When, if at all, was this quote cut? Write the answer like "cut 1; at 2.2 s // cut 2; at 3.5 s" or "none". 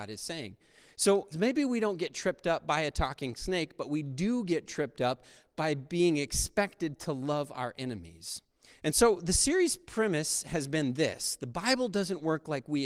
cut 1; at 1.3 s